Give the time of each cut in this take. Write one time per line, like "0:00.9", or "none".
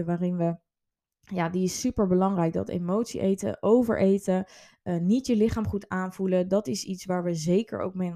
none